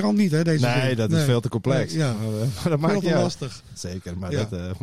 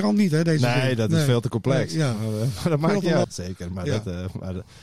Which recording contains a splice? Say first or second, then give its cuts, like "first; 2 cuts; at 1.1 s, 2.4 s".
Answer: second; 1 cut; at 3.2 s